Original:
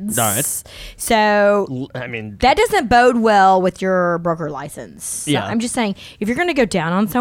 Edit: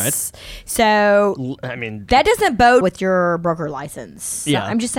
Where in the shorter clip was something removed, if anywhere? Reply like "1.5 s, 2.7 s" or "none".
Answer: 2.8 s